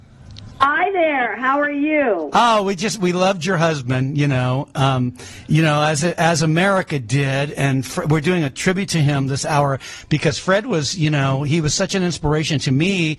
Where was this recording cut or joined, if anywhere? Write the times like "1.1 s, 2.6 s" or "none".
none